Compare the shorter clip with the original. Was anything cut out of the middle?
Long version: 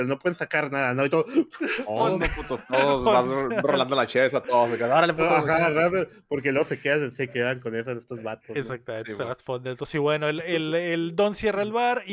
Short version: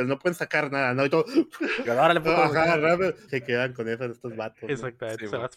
yes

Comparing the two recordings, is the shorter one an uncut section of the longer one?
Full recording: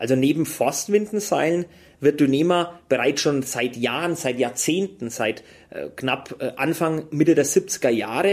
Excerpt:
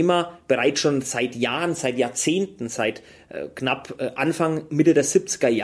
yes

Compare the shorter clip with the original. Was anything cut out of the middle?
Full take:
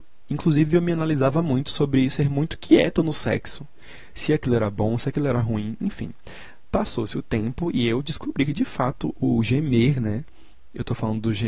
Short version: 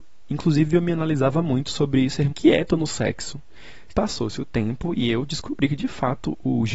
yes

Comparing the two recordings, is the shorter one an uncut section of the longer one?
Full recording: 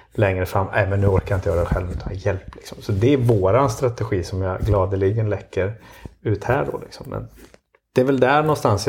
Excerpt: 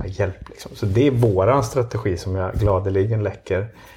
yes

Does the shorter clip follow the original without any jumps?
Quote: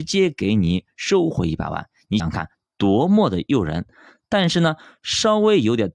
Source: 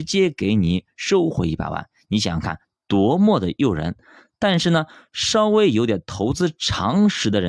no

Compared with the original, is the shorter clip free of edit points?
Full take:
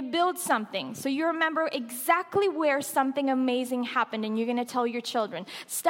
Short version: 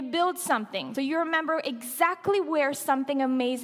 no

